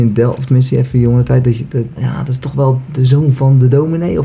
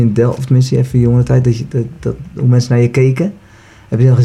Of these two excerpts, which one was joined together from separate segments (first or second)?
first